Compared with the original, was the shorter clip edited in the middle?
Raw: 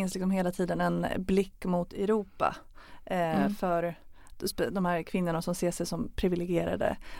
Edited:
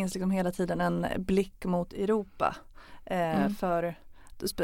no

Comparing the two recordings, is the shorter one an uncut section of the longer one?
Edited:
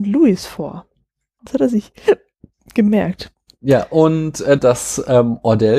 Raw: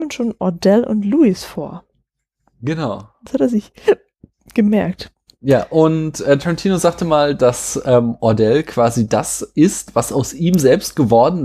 no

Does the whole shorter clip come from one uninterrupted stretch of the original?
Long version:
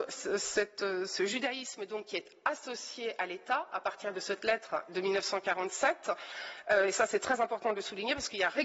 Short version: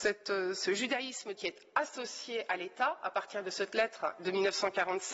no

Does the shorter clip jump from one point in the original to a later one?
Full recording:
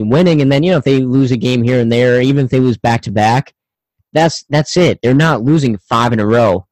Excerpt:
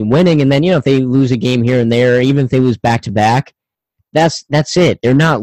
no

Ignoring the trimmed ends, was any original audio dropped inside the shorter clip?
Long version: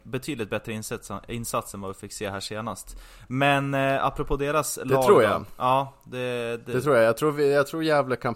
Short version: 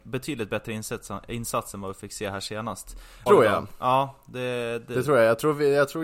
yes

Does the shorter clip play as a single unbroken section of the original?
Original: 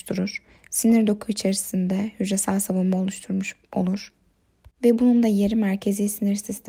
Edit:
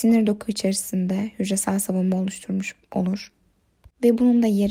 yes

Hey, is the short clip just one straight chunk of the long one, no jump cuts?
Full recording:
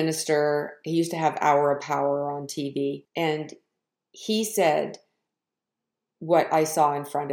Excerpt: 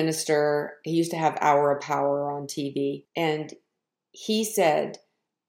yes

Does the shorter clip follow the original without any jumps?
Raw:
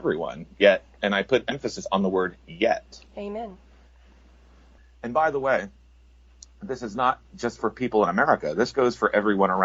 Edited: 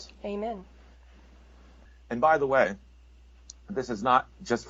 yes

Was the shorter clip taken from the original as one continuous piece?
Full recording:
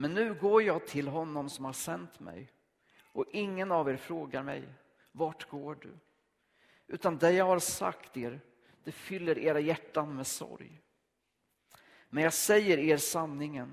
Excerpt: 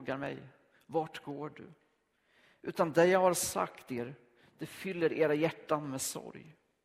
yes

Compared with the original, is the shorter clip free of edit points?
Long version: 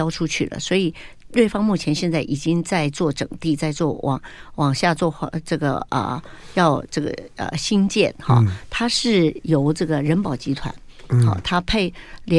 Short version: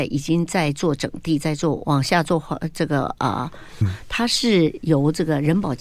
no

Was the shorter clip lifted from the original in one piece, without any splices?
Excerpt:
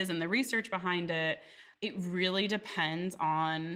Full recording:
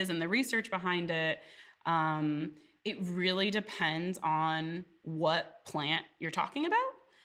no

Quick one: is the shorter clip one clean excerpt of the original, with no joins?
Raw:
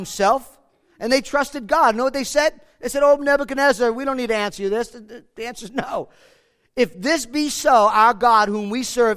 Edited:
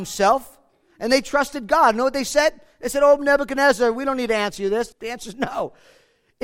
no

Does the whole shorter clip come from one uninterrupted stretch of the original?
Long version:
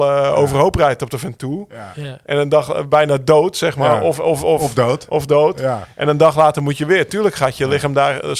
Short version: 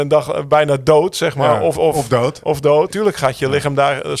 no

